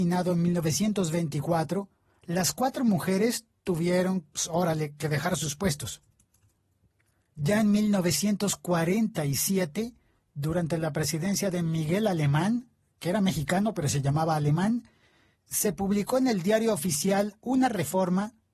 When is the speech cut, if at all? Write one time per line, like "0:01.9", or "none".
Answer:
none